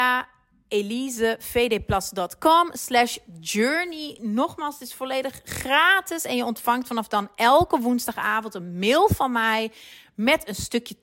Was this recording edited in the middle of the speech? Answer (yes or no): no